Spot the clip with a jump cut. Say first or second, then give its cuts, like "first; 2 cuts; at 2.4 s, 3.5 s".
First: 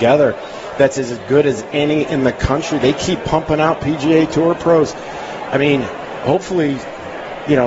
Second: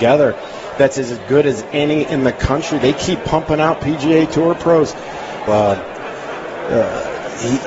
second; 1 cut; at 5.5 s